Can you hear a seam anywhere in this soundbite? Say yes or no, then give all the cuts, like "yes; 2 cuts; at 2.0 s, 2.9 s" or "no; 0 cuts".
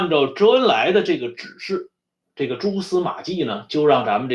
yes; 1 cut; at 2.2 s